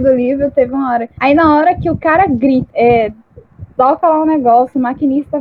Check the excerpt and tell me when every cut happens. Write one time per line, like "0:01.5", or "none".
0:01.2
0:02.7